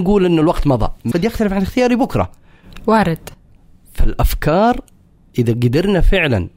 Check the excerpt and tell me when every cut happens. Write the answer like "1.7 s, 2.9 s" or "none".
1.1 s